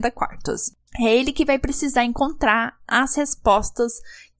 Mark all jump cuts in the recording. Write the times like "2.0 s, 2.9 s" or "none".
none